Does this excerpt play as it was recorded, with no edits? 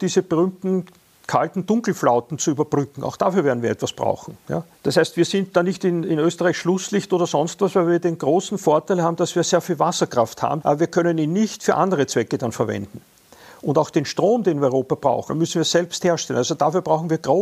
no; 3 cuts; at 4.7 s, 10.6 s, 15.3 s

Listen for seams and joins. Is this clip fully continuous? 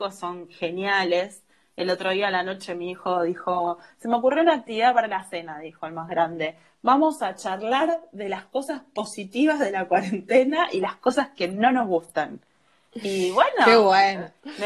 yes; 0 cuts

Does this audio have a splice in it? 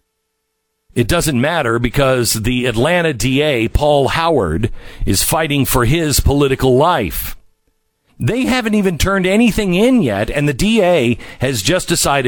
yes; 1 cut; at 8.1 s

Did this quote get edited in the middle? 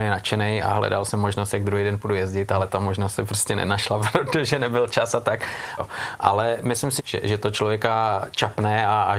yes; 2 cuts; at 5.8 s, 7.0 s

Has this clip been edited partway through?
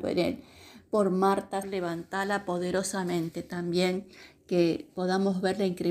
yes; 1 cut; at 1.6 s

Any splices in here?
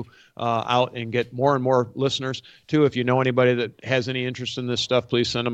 no; 0 cuts

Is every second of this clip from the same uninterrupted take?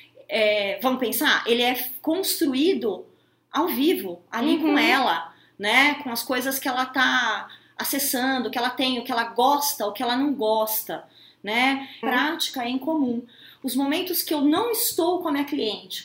no; 1 cut; at 12.0 s

